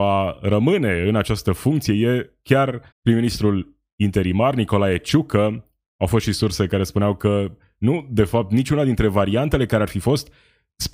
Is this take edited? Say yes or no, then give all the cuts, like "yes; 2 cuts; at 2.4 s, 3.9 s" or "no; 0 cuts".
yes; 1 cut; at 2.9 s